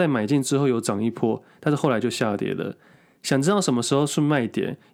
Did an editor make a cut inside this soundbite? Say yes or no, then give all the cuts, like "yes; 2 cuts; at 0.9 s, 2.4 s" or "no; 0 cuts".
no; 0 cuts